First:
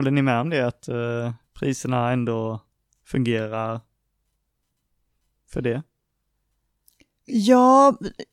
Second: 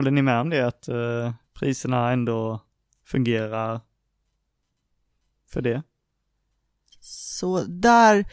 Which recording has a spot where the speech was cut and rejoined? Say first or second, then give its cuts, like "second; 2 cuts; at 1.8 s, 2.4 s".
second; 1 cut; at 6.9 s